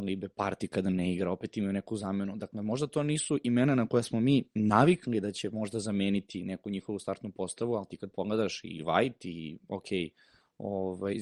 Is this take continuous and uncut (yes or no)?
yes